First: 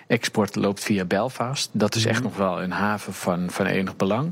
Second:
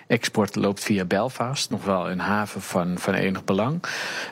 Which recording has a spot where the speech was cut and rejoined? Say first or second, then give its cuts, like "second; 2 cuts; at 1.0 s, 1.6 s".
second; 1 cut; at 1.7 s